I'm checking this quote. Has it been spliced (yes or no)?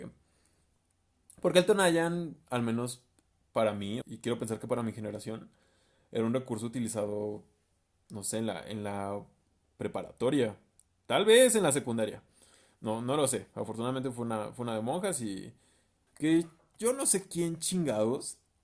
yes